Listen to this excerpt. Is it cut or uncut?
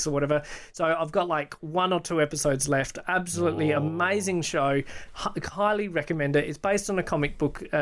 uncut